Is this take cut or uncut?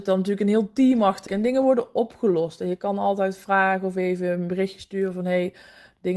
cut